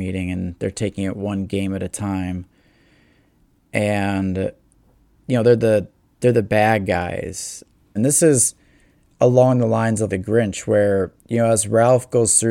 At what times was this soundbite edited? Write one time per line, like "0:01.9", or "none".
0:08.0
0:10.1
0:11.2